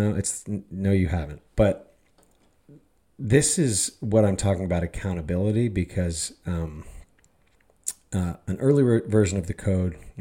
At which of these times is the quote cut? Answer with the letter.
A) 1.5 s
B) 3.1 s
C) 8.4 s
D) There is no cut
A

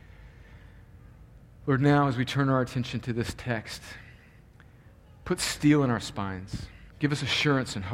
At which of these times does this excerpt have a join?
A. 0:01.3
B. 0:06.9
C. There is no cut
B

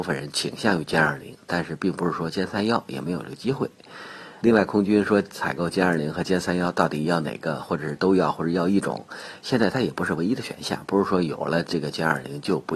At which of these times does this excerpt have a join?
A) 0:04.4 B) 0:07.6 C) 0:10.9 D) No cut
A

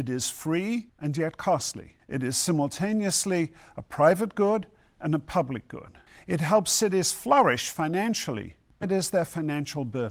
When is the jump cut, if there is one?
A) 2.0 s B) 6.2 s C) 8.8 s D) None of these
C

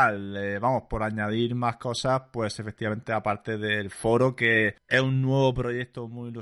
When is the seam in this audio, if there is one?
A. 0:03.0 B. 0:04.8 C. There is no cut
B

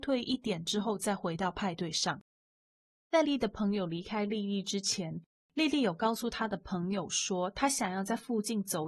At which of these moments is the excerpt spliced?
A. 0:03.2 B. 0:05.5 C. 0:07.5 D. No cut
A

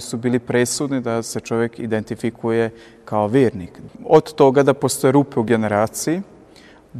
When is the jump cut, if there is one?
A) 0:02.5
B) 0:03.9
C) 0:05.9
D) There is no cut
B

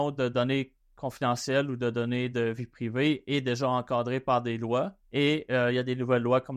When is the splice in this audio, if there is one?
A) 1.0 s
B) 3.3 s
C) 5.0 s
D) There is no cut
C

